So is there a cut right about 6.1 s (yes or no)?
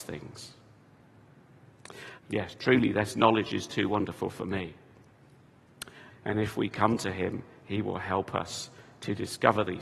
yes